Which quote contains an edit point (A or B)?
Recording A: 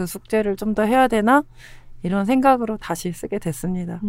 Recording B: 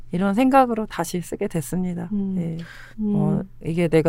B